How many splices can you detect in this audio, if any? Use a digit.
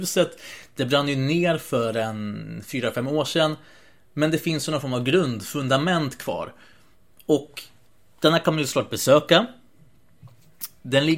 0